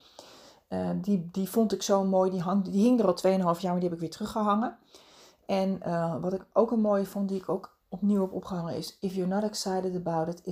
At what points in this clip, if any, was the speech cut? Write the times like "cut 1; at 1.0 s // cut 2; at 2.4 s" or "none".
none